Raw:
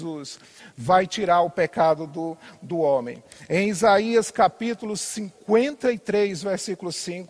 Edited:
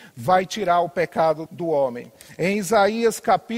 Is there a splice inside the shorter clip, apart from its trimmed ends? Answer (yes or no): yes